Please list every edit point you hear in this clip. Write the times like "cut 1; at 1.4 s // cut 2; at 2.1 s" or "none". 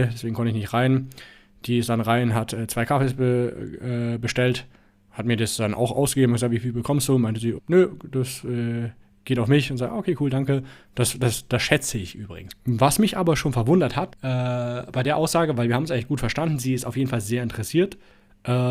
cut 1; at 7.6 s // cut 2; at 12.5 s // cut 3; at 14.1 s